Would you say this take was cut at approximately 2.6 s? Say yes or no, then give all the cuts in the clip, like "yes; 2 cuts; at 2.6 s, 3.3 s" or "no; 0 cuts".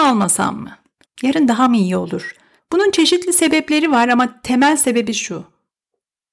yes; 2 cuts; at 1.0 s, 2.6 s